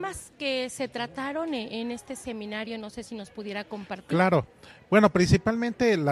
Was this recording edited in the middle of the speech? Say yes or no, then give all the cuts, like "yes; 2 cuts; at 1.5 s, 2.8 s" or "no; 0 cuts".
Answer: no; 0 cuts